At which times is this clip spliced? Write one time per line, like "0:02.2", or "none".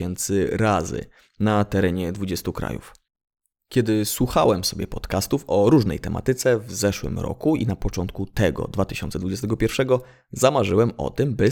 none